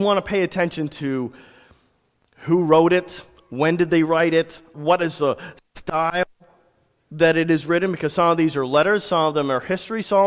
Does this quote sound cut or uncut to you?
cut